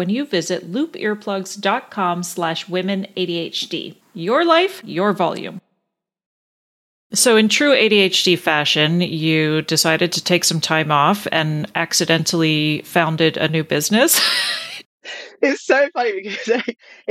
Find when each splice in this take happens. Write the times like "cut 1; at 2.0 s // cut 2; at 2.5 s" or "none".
cut 1; at 4.0 s